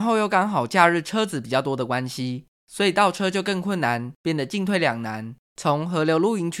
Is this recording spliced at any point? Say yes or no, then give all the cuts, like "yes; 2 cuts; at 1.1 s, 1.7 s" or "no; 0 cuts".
yes; 1 cut; at 5.5 s